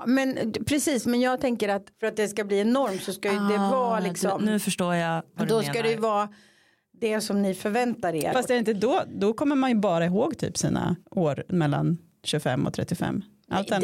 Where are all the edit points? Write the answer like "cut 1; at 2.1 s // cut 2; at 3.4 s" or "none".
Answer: cut 1; at 8.3 s // cut 2; at 11.0 s